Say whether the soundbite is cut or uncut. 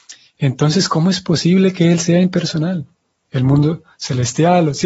cut